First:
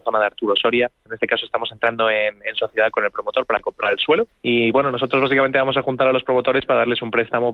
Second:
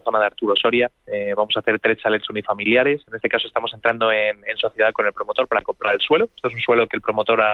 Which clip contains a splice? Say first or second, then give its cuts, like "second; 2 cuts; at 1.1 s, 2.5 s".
first; 2 cuts; at 1.0 s, 4.3 s